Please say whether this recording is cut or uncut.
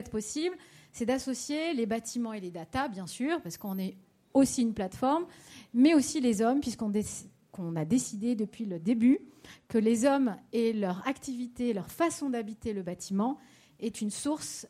uncut